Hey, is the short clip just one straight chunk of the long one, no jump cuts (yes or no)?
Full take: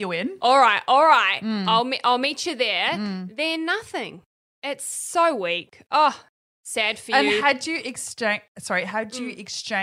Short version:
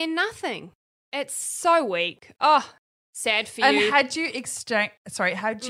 yes